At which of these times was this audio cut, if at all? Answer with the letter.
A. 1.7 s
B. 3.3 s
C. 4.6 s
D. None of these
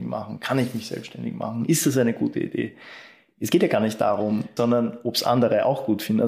C